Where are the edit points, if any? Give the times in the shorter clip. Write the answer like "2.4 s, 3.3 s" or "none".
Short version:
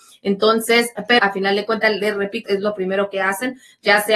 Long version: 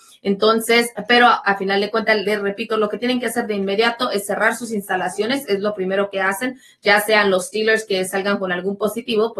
1.2 s, 2.5 s